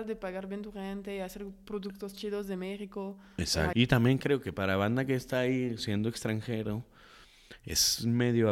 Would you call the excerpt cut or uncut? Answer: cut